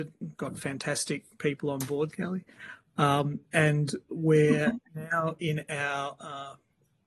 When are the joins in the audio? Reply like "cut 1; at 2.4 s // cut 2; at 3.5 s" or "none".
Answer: cut 1; at 2.1 s